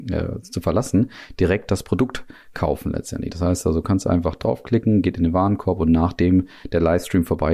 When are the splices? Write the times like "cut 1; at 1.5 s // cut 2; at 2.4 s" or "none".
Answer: none